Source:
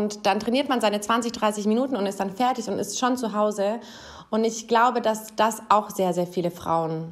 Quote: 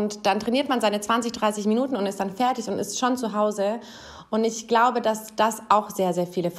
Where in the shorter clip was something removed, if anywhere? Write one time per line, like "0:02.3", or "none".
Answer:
none